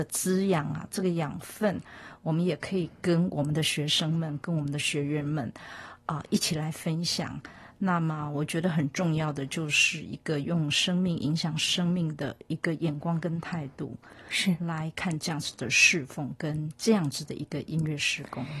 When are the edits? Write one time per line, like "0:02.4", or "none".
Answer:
none